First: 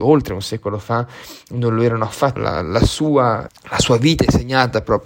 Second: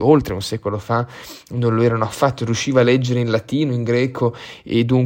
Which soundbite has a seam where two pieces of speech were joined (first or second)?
first